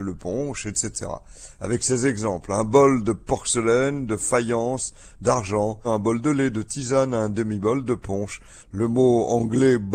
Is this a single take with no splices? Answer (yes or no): no